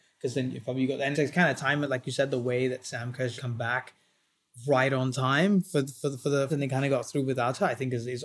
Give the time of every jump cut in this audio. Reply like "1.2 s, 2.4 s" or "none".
1.1 s, 3.4 s, 6.5 s